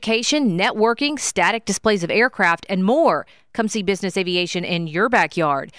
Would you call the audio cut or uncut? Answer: uncut